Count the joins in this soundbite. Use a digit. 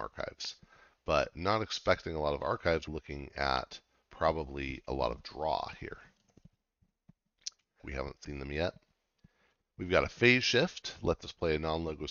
2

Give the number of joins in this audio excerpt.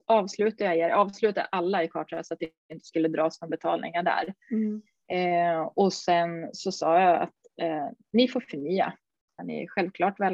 1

